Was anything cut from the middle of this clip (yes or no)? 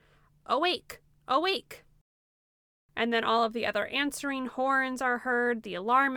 no